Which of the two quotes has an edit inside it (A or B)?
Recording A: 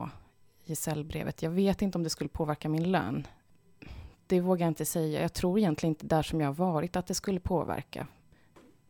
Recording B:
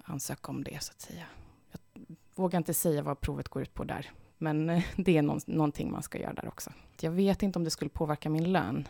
B